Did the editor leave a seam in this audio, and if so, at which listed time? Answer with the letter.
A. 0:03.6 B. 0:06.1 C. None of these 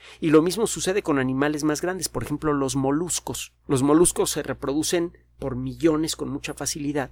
A